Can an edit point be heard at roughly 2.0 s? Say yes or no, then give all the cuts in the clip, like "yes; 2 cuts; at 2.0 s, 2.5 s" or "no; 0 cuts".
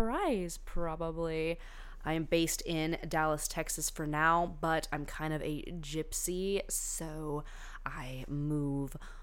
yes; 1 cut; at 2.0 s